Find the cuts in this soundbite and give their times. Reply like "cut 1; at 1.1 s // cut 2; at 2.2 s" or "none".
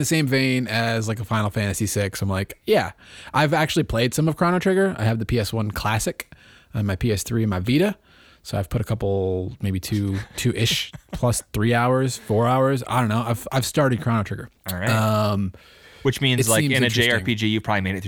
cut 1; at 14.6 s